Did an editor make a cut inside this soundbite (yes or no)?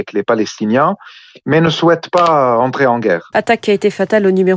yes